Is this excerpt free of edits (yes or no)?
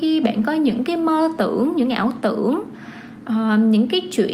yes